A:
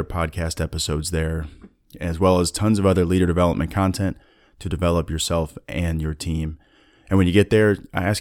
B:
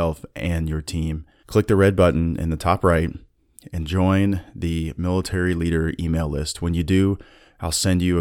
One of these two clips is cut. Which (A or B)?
B